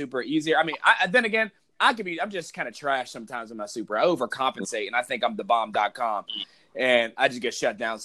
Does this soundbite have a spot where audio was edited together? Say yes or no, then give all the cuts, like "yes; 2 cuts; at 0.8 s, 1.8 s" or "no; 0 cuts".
no; 0 cuts